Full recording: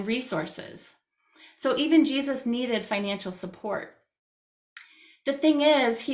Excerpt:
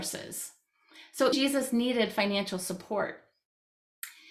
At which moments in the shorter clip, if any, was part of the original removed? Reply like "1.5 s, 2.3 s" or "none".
1.3 s